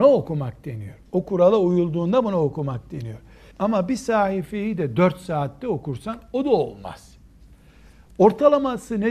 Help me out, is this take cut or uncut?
cut